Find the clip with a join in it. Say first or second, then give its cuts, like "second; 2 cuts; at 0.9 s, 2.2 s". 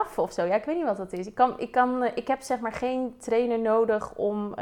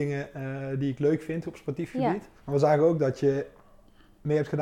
second; 1 cut; at 2.4 s